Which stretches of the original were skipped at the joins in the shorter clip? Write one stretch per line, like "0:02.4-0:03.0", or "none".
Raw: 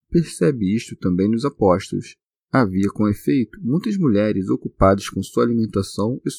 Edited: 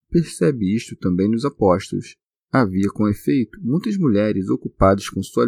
none